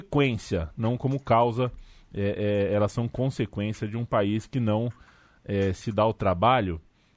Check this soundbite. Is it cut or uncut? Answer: uncut